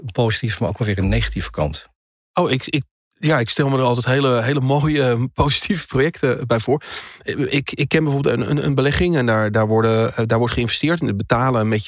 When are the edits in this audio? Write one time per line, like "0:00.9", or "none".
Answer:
none